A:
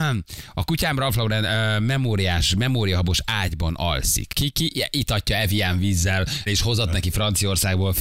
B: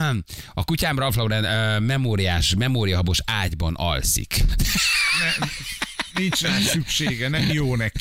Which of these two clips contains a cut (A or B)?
A